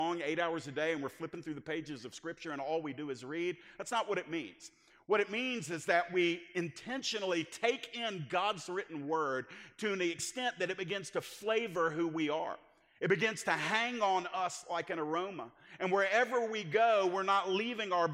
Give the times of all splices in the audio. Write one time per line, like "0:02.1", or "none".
none